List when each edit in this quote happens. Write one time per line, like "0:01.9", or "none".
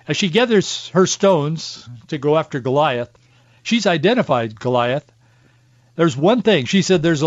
none

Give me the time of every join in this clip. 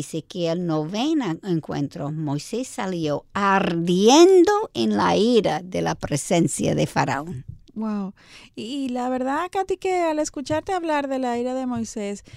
none

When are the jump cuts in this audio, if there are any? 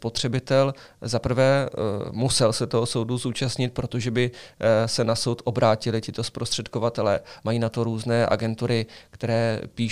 0:07.4

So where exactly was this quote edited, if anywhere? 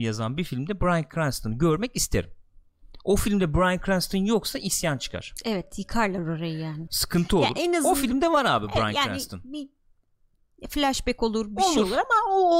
0:06.9

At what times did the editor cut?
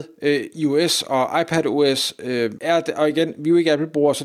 0:02.5

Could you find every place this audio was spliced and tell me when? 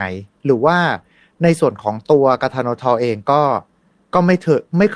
none

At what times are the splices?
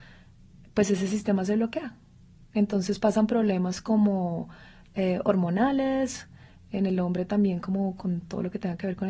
none

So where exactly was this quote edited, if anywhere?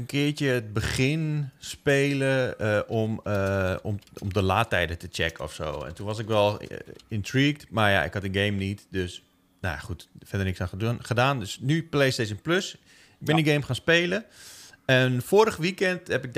none

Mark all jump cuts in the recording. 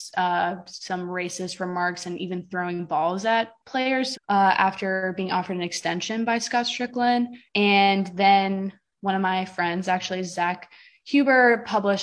0:04.1

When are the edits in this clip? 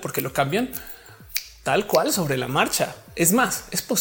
none

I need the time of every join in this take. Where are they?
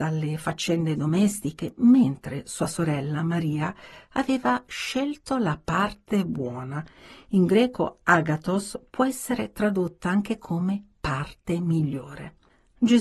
none

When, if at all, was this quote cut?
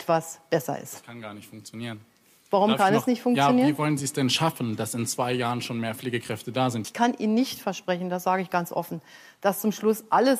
0:06.8

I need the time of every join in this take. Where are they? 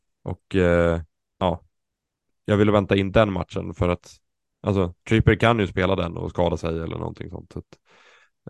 none

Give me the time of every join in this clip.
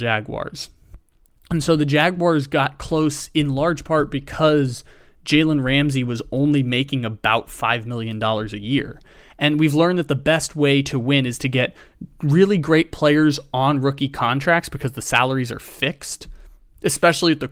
none

